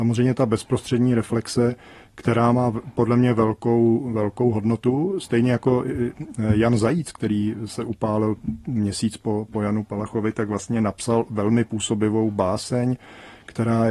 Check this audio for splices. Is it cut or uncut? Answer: uncut